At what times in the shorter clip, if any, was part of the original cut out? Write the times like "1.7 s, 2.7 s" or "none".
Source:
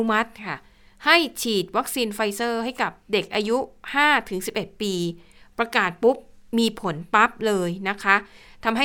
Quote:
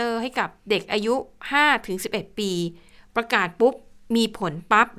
none